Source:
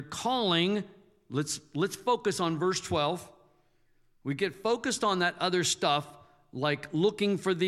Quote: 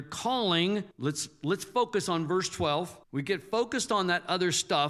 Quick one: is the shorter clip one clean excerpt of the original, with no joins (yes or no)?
no